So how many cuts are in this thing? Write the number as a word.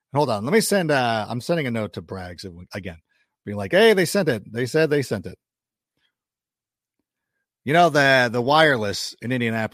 zero